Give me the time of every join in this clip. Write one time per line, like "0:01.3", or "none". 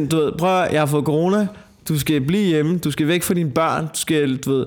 none